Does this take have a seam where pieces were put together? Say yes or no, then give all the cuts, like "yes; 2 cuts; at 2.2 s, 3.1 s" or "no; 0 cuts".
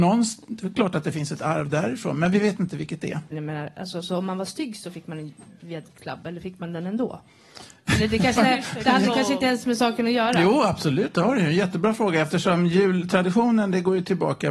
yes; 2 cuts; at 3.3 s, 8.3 s